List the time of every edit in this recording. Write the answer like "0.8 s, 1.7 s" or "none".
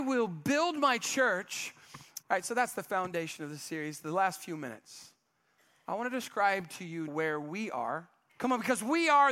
2.2 s, 7.1 s, 8.3 s

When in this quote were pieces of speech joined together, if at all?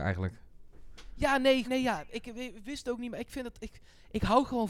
1.6 s

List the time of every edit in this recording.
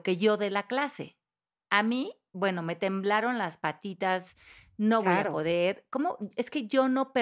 none

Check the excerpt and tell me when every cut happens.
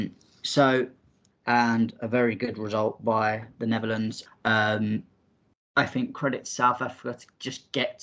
1.3 s, 4.3 s

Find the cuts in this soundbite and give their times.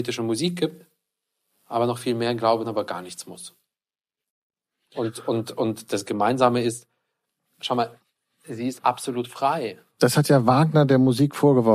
2.6 s, 8.8 s, 10.0 s

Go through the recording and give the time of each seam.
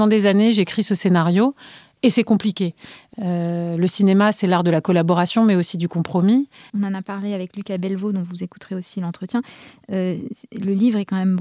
3.1 s, 6.7 s

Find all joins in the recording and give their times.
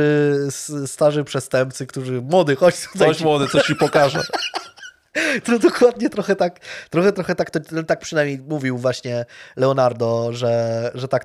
7.1 s

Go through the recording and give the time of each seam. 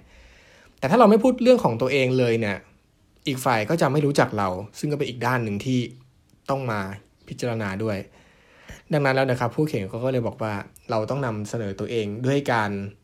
none

